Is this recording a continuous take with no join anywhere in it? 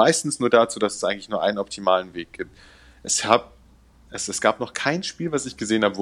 yes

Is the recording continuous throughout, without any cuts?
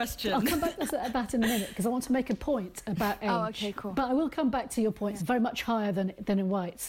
no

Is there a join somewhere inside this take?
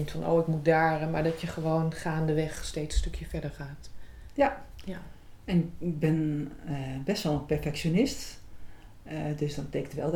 no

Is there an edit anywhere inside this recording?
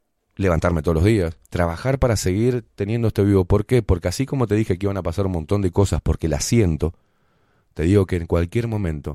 yes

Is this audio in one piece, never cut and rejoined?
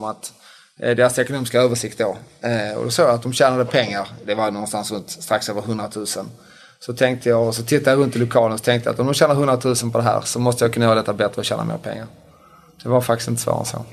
yes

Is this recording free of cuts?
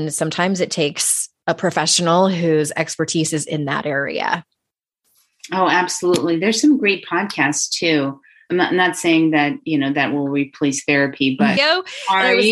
no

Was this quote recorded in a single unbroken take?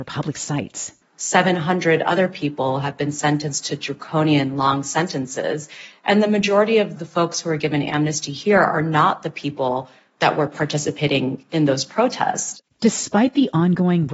no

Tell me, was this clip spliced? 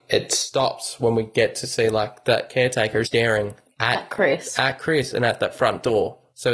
yes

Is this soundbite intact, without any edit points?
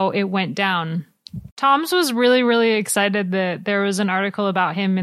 no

